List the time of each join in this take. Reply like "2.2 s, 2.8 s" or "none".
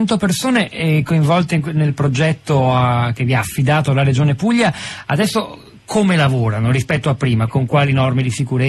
7.5 s